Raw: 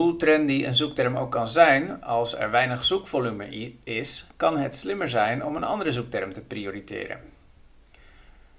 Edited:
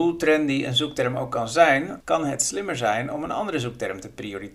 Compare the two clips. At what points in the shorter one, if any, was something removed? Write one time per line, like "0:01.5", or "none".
0:02.0